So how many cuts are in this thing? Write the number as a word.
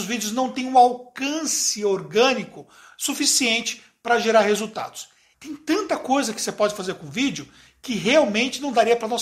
one